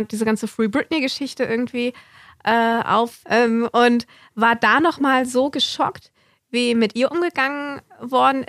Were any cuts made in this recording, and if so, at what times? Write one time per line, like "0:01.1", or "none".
0:03.2